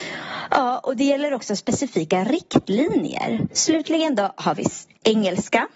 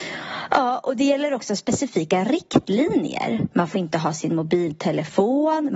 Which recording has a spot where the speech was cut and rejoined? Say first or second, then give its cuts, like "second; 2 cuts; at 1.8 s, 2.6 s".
first; 1 cut; at 3.5 s